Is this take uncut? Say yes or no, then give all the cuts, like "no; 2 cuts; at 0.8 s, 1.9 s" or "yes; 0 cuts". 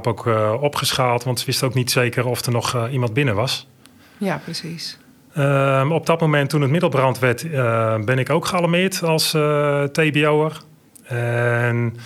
yes; 0 cuts